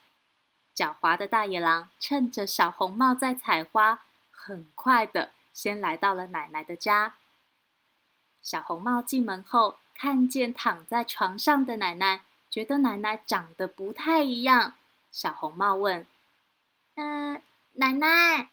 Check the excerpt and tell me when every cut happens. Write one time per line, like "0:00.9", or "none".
0:07.7